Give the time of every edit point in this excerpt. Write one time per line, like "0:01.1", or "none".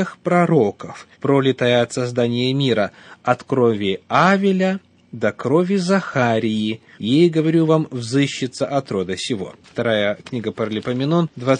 0:01.1
0:06.9
0:09.6